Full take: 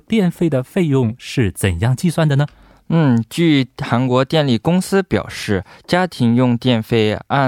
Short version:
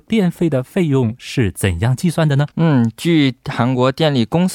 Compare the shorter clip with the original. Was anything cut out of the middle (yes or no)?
yes